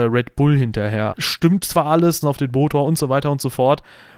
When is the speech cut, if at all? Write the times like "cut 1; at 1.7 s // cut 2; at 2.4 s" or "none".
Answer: cut 1; at 1.1 s // cut 2; at 2.2 s